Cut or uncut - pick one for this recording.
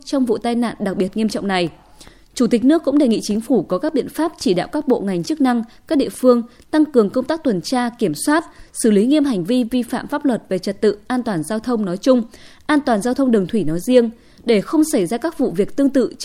uncut